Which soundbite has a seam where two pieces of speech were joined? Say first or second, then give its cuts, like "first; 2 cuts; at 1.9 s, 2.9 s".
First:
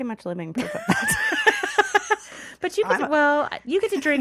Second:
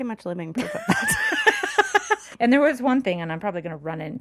second; 1 cut; at 2.3 s